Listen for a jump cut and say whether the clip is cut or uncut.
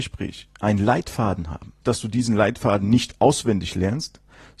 cut